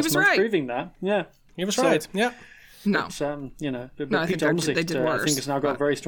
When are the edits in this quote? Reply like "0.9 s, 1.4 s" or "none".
2.8 s, 3.9 s

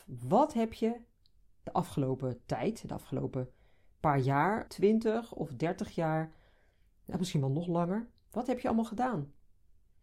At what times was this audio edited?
4.7 s

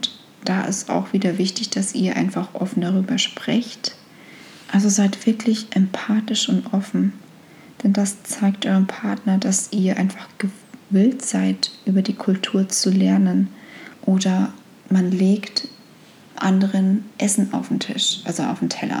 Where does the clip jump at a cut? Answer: 4.6 s, 13.9 s

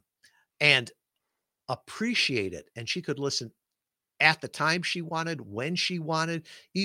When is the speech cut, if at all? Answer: none

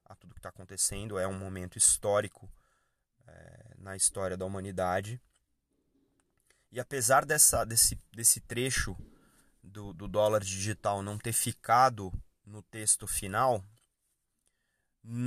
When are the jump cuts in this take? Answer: none

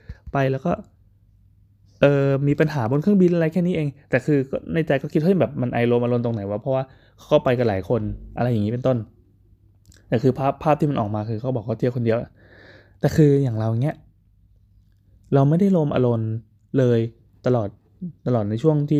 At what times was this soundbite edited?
none

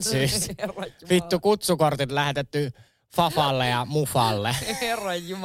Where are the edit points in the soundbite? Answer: none

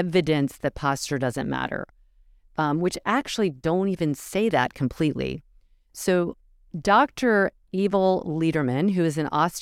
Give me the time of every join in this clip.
none

